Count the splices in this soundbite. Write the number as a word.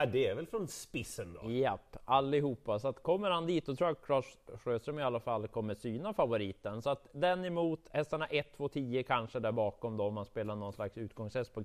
zero